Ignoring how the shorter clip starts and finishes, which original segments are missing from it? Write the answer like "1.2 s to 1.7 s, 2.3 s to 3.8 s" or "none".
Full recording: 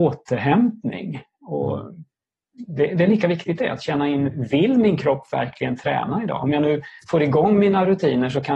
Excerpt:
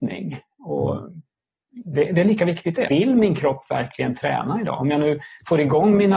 3.7 s to 4.5 s